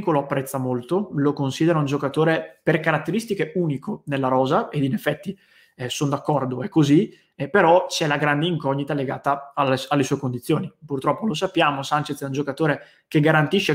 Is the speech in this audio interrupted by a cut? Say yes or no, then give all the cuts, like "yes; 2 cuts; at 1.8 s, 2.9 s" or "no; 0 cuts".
no; 0 cuts